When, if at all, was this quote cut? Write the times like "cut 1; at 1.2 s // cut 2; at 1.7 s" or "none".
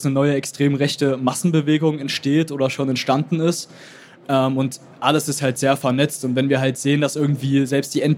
none